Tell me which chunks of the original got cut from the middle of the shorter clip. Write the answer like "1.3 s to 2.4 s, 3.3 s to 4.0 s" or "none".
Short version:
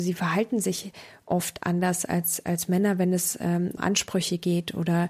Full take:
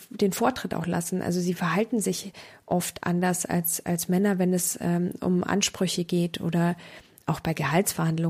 5.2 s to 5.4 s